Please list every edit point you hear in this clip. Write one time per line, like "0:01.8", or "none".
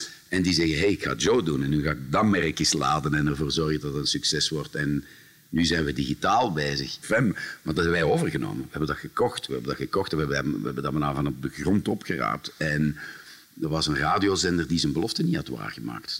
0:07.0
0:09.5